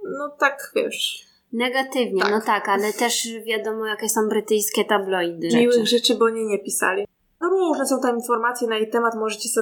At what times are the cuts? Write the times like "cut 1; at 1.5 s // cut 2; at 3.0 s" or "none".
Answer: cut 1; at 5.5 s // cut 2; at 7.4 s